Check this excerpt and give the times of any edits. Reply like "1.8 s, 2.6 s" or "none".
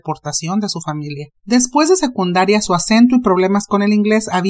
1.3 s